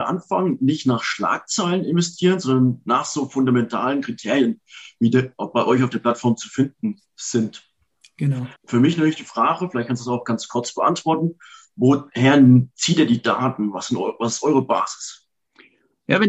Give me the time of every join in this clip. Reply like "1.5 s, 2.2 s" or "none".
8.6 s